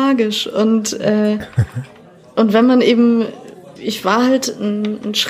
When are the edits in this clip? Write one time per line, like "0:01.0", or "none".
0:03.8